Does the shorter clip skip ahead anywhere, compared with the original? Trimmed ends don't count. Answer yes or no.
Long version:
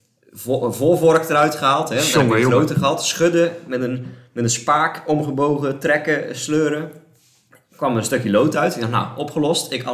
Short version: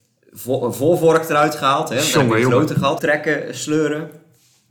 yes